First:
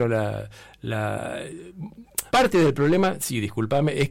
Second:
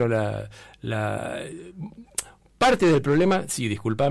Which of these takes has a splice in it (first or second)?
first